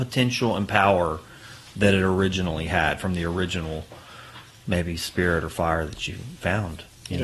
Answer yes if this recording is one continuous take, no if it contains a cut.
yes